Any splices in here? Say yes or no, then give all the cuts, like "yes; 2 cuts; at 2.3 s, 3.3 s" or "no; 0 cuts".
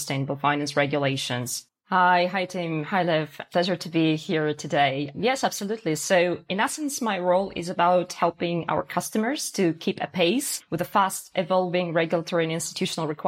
yes; 1 cut; at 1.7 s